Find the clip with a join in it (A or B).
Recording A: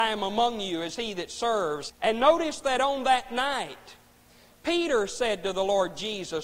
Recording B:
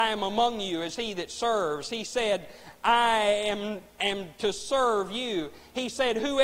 A